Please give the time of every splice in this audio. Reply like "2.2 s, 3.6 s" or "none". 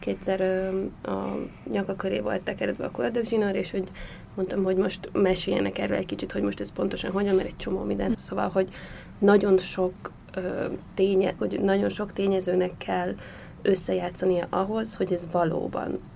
8.1 s, 11.4 s